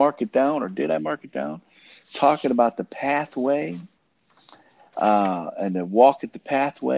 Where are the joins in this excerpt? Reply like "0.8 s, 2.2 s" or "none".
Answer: none